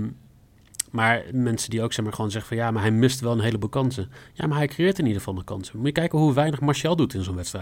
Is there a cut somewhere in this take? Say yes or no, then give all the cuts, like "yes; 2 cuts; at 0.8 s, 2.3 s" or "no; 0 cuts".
no; 0 cuts